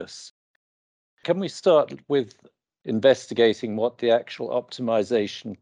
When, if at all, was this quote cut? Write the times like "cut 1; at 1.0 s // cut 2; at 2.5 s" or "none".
none